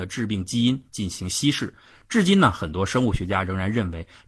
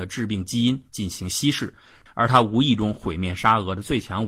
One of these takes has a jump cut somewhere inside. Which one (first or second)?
second